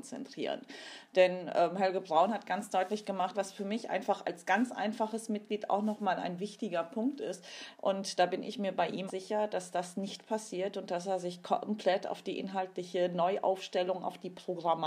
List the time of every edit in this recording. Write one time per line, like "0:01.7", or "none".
0:03.3
0:07.7
0:09.1